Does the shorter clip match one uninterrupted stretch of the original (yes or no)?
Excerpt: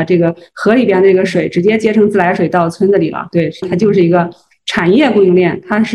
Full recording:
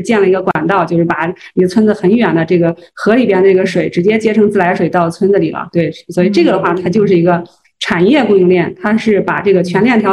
no